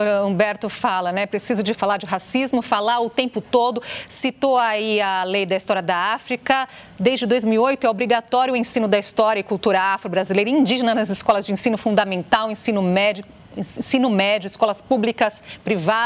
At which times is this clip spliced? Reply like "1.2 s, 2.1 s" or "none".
1.7 s